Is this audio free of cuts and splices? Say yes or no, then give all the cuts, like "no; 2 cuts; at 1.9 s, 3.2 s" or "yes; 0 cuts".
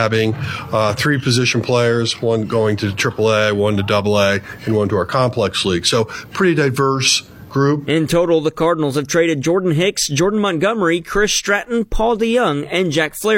yes; 0 cuts